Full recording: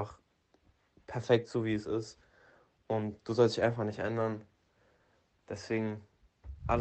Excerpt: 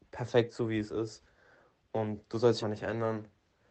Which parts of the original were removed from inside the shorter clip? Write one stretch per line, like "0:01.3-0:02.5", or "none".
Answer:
0:03.6-0:03.8